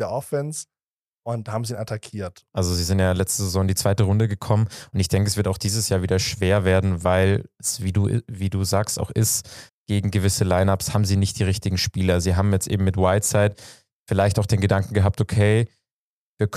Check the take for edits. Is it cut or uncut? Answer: cut